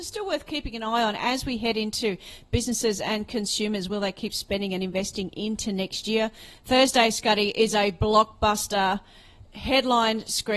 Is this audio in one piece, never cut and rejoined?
yes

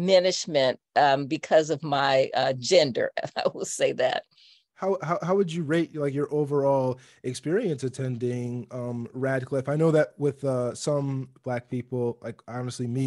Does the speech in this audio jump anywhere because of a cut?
no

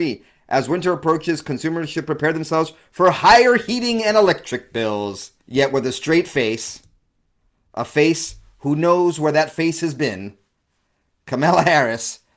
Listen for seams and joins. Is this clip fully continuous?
no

